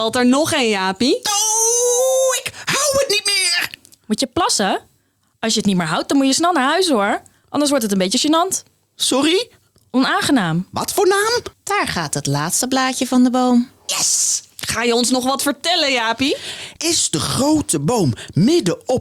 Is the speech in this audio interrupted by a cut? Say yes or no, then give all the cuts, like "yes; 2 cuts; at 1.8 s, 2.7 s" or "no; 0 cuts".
yes; 3 cuts; at 11.5 s, 13.9 s, 16.8 s